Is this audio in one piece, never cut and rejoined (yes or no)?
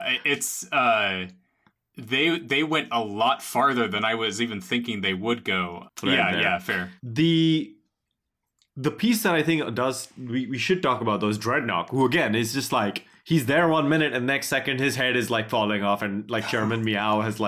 no